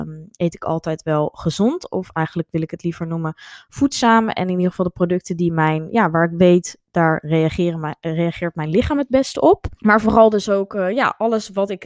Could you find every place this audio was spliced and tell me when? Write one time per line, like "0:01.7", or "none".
0:09.8